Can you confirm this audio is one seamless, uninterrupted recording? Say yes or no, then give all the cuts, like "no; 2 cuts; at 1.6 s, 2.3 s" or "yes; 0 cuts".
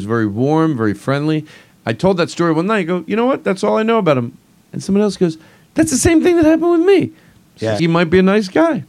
no; 1 cut; at 7.8 s